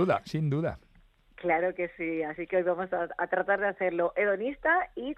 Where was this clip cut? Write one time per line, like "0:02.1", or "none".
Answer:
none